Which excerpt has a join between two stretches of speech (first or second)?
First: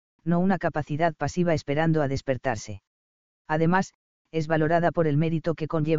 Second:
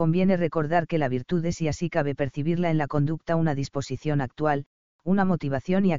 first